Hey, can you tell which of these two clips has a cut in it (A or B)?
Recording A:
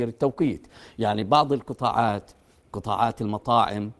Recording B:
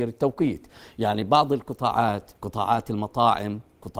B